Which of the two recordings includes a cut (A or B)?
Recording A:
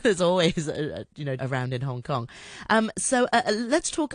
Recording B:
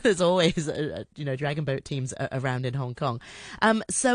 A